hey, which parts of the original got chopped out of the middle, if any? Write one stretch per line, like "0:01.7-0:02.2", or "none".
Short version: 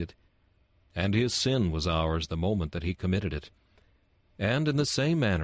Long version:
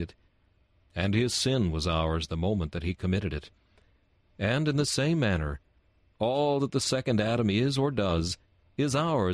none